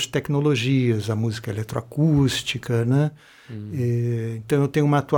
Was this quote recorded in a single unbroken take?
yes; 0 cuts

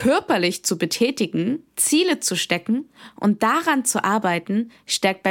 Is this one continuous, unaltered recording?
no; 1 cut; at 1.7 s

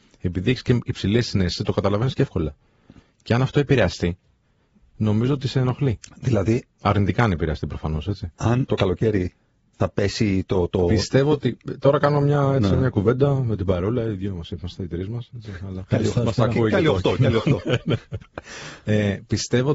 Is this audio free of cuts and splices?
no; 1 cut; at 8.7 s

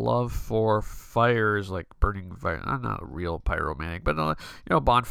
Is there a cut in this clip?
no; 0 cuts

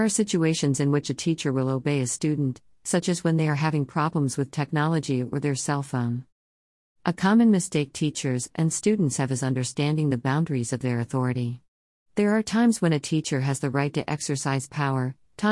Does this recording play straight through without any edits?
yes; 0 cuts

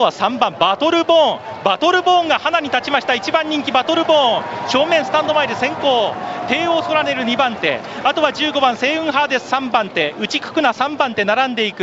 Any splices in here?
no; 0 cuts

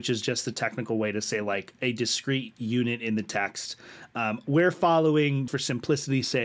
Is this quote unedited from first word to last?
no; 1 cut; at 5.5 s

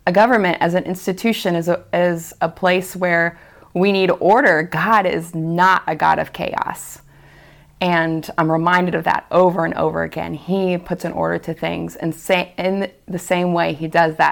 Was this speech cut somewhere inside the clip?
no; 0 cuts

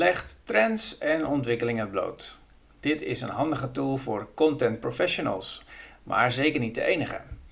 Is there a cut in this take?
no; 0 cuts

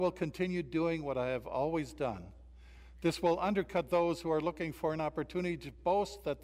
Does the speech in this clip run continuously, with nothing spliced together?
yes; 0 cuts

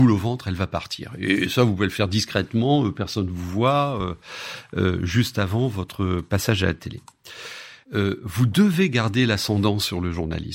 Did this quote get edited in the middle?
yes; 1 cut; at 7.8 s

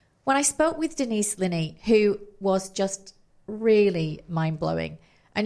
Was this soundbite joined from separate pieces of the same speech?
no; 0 cuts

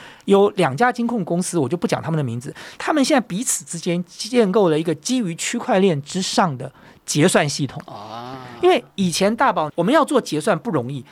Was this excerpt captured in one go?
no; 1 cut; at 9.7 s

